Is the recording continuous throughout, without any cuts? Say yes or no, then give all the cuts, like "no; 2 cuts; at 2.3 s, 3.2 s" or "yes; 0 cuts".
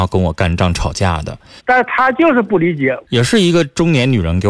no; 2 cuts; at 1.6 s, 3.0 s